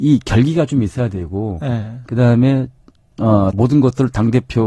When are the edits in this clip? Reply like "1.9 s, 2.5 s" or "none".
3.5 s